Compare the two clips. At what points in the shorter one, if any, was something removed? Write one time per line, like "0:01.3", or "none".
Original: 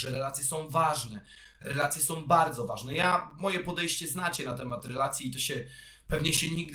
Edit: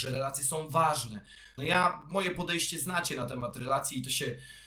0:01.6